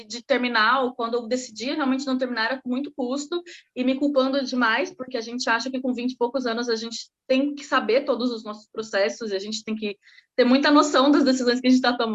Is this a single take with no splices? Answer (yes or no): yes